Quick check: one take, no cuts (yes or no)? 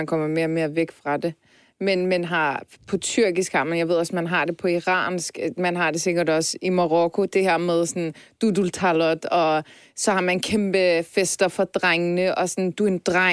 no